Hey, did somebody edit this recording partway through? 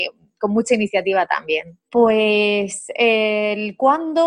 yes; 1 cut; at 1.8 s

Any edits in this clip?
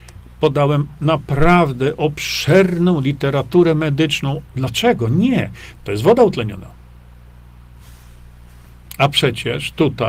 yes; 2 cuts; at 4.5 s, 5.8 s

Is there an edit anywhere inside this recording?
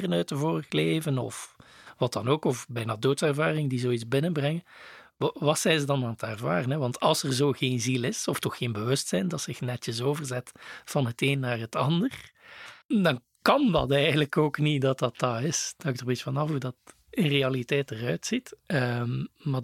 yes; 1 cut; at 1.2 s

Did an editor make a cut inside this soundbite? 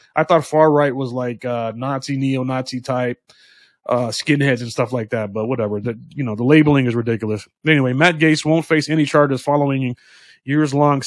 no; 0 cuts

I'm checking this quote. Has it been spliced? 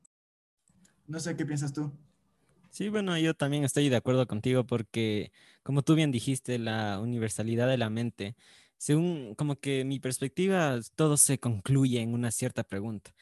no; 0 cuts

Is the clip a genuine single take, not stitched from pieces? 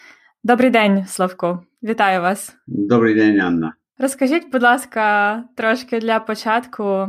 yes; 0 cuts

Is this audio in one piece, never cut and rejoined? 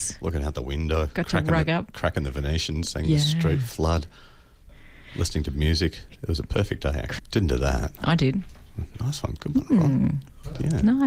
no; 1 cut; at 7.2 s

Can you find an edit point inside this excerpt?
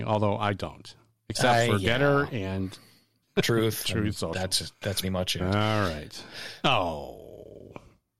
yes; 2 cuts; at 5.0 s, 6.6 s

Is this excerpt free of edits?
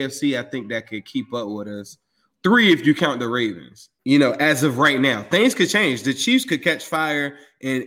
no; 1 cut; at 4.0 s

